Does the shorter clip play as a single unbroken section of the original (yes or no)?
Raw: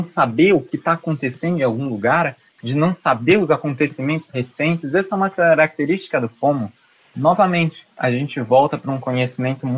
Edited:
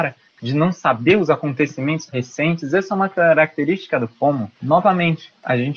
no